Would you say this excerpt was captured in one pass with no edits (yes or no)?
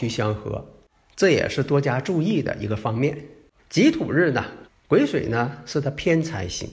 no